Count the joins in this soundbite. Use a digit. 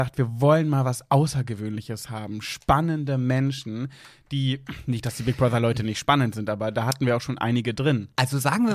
0